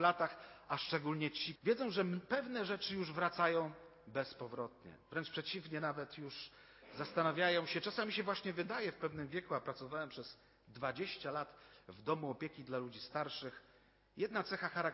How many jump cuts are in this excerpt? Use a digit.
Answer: 1